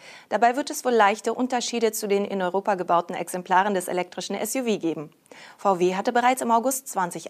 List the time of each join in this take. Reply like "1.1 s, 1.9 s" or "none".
none